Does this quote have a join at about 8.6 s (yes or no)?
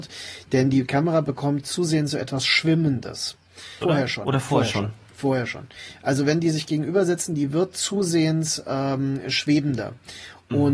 no